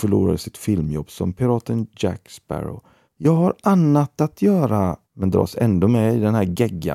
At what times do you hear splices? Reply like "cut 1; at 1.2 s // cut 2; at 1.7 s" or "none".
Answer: cut 1; at 3.1 s // cut 2; at 5.0 s